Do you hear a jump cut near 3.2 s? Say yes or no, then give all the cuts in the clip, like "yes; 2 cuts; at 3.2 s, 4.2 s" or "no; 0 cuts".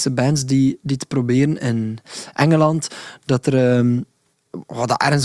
no; 1 cut; at 1.6 s